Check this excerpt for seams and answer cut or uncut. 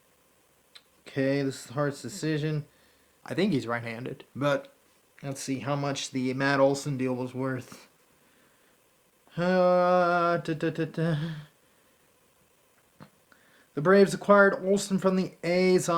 cut